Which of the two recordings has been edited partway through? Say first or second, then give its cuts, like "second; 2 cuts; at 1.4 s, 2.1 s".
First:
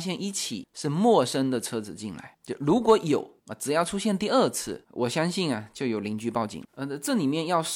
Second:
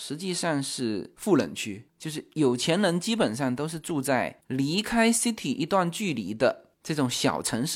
first; 1 cut; at 6.7 s